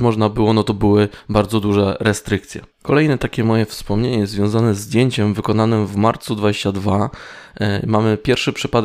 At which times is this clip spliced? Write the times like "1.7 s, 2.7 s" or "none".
2.7 s